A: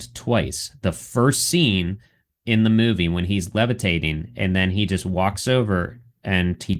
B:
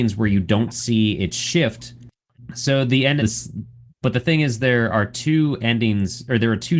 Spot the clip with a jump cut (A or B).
B